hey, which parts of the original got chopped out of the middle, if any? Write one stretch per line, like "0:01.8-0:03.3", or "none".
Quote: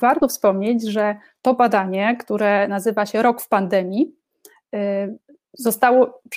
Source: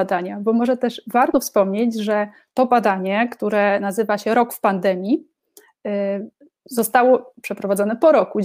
none